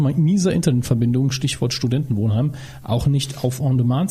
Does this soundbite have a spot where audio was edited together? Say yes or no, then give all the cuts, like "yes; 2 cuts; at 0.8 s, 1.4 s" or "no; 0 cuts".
no; 0 cuts